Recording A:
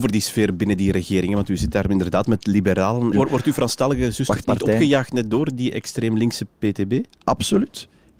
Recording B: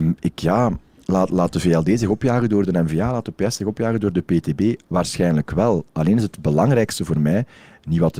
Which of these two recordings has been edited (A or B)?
A